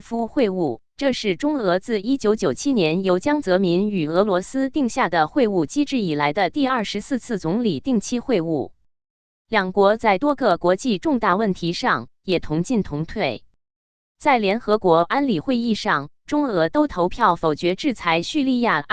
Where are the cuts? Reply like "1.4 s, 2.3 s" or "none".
none